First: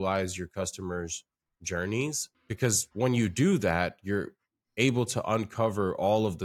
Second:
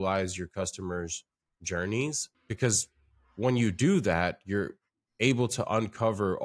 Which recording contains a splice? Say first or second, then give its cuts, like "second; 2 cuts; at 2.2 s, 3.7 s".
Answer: first; 1 cut; at 2.9 s